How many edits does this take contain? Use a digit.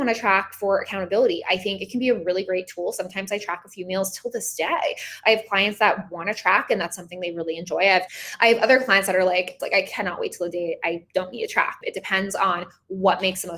2